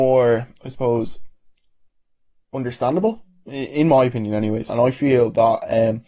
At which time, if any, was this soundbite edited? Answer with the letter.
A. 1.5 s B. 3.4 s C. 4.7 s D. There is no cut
C